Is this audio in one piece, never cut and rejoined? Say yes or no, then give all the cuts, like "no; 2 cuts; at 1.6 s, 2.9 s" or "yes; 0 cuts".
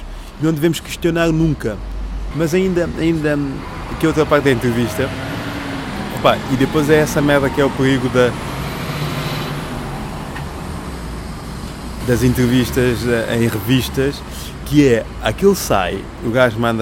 no; 2 cuts; at 2.3 s, 12.0 s